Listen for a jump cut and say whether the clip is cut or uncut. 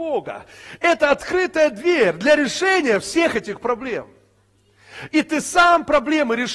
uncut